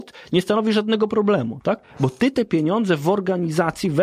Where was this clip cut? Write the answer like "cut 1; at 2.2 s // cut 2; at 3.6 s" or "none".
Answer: none